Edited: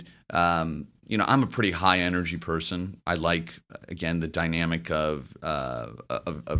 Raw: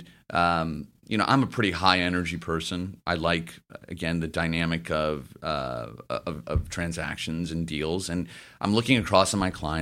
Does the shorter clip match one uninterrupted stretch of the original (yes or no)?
yes